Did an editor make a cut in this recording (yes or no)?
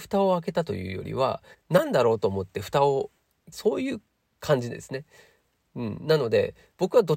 yes